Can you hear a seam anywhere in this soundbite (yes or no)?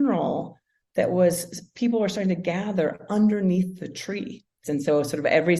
yes